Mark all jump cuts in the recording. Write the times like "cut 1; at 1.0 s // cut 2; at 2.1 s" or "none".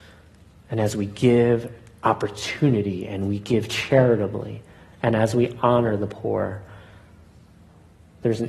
none